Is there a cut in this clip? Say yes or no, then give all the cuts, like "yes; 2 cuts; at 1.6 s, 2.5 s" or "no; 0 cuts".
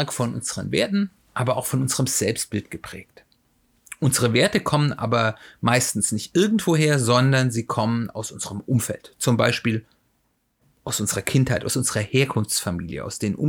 no; 0 cuts